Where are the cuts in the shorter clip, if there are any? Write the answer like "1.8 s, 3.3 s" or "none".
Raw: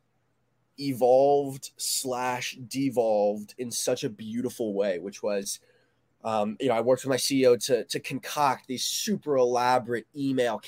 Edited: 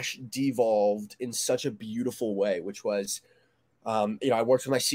none